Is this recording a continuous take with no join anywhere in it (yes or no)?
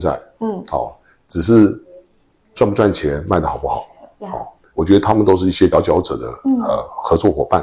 no